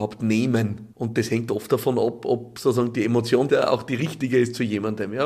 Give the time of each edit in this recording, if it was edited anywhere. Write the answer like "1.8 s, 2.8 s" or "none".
0.9 s, 3.5 s